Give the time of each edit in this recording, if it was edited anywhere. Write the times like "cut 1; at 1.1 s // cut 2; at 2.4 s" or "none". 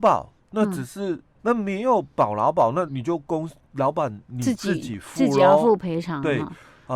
cut 1; at 1.4 s // cut 2; at 2.9 s